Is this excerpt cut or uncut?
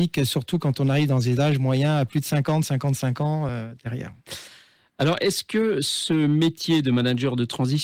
uncut